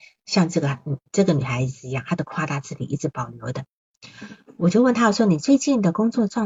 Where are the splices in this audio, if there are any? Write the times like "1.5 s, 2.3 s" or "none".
none